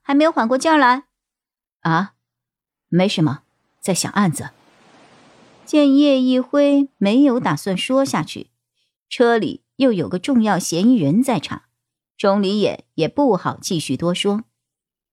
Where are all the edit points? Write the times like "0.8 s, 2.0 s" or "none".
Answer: none